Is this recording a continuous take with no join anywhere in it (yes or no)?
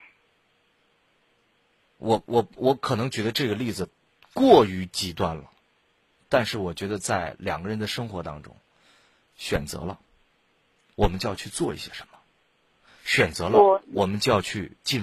yes